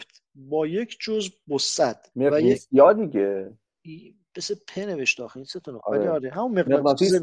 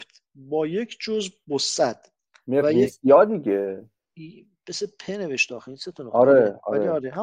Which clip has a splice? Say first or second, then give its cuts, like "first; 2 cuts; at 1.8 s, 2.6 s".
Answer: first; 2 cuts; at 2.1 s, 5.8 s